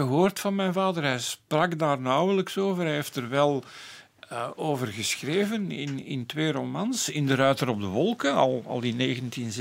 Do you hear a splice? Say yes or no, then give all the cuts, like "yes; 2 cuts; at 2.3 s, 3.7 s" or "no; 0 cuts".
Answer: no; 0 cuts